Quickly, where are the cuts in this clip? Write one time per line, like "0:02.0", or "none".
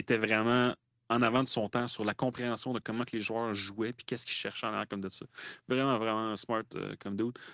none